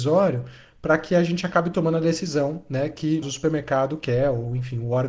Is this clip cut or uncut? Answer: cut